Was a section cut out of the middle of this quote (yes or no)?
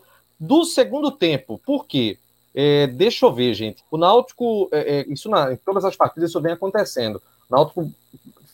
yes